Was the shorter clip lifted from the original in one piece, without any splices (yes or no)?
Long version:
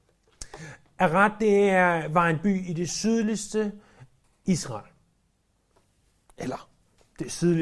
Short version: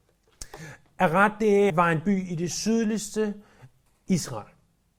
no